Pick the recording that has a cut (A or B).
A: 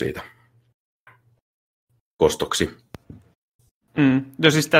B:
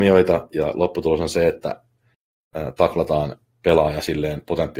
A